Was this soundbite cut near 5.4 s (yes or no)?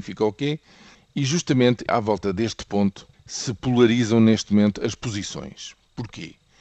no